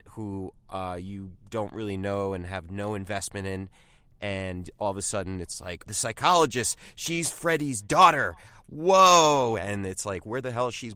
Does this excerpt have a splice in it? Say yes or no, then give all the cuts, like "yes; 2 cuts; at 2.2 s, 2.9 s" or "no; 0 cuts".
yes; 1 cut; at 5.9 s